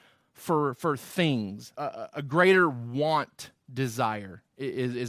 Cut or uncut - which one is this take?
cut